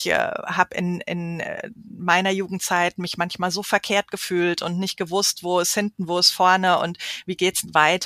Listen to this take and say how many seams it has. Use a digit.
0